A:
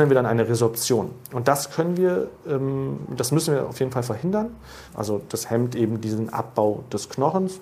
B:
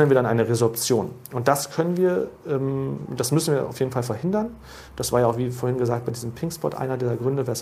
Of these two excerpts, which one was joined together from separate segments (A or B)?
A